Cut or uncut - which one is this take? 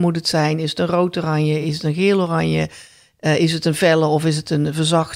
uncut